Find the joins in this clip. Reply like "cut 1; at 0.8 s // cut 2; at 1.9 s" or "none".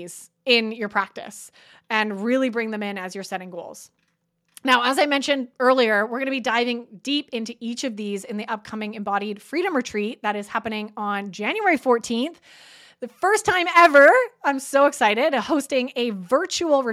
none